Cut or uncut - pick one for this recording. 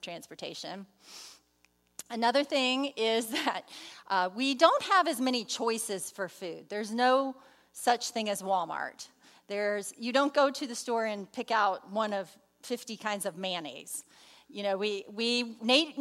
uncut